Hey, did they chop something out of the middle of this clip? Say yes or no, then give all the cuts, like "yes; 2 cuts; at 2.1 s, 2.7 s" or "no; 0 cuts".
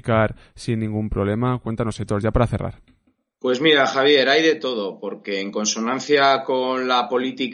no; 0 cuts